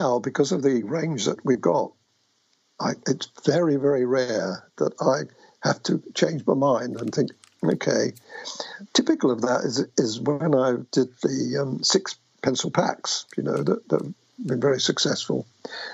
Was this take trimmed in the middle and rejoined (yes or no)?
no